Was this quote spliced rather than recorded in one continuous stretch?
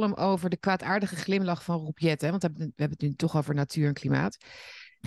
no; 0 cuts

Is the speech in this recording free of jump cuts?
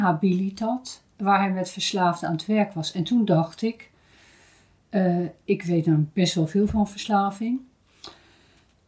yes; 0 cuts

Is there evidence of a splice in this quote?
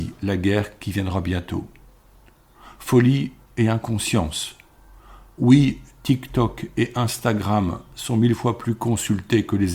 no; 0 cuts

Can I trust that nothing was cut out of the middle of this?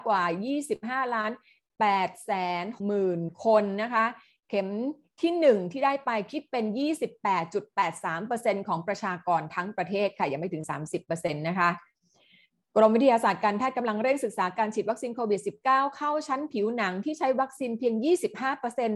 no; 1 cut; at 2.8 s

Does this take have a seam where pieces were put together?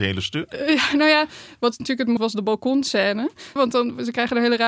yes; 2 cuts; at 2.2 s, 3.6 s

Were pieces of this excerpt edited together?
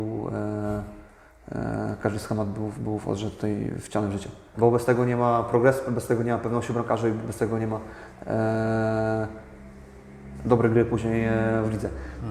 yes; 1 cut; at 4.5 s

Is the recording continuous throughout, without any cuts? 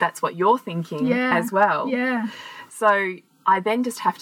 yes; 0 cuts

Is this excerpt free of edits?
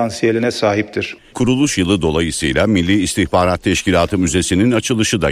no; 1 cut; at 1.3 s

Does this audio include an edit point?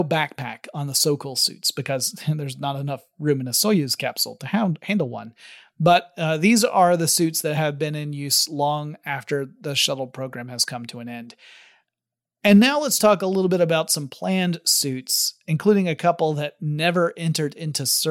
no; 0 cuts

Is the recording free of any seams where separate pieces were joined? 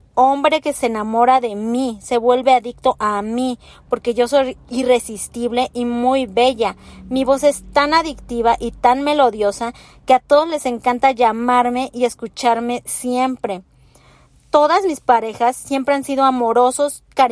yes; 0 cuts

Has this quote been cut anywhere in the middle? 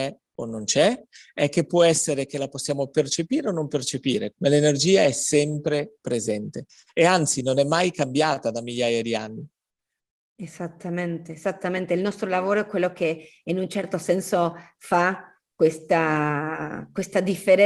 yes; 1 cut; at 4.3 s

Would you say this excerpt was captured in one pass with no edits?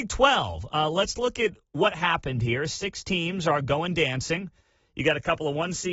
yes; 0 cuts

